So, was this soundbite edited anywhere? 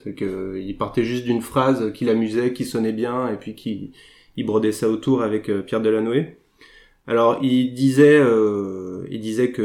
no; 0 cuts

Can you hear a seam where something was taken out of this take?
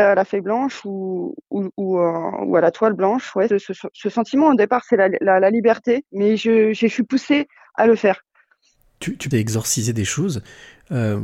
yes; 3 cuts; at 3.5 s, 6.1 s, 9.3 s

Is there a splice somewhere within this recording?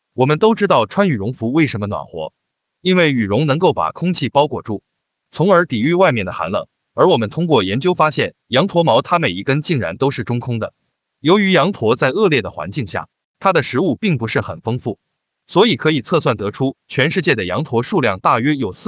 no; 0 cuts

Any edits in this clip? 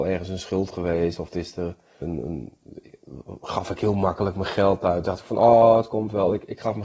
yes; 1 cut; at 2.0 s

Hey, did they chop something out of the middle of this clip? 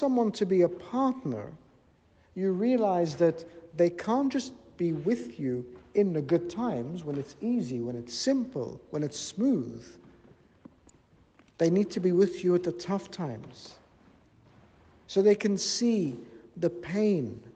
no; 0 cuts

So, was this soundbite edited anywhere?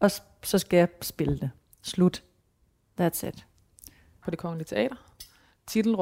yes; 1 cut; at 4.2 s

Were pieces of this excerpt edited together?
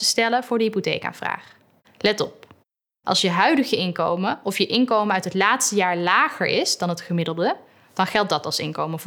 yes; 1 cut; at 1.8 s

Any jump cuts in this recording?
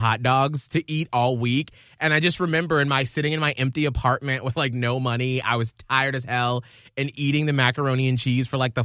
no; 0 cuts

